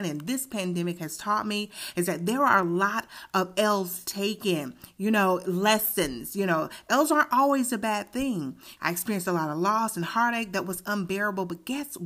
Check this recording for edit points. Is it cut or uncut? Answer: cut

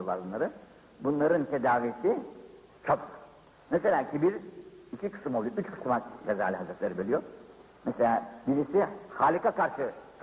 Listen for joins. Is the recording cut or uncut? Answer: uncut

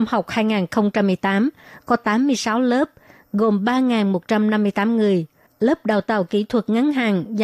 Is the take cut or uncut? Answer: uncut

